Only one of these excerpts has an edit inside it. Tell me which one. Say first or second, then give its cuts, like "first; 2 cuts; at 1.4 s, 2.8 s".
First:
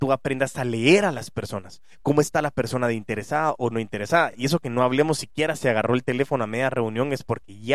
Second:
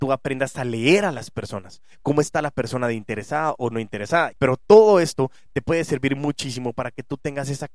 second; 1 cut; at 4.3 s